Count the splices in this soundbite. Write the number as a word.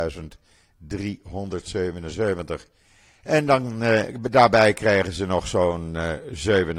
one